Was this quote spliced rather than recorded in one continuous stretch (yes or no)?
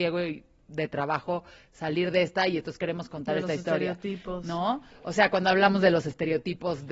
no